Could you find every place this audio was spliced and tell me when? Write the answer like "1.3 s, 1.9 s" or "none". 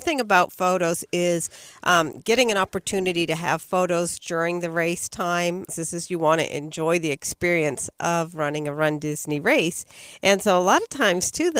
5.7 s